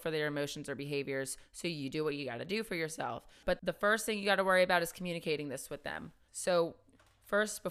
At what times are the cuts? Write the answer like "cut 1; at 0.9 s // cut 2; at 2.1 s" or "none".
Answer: cut 1; at 6.3 s